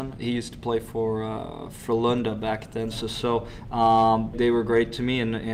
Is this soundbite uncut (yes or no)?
no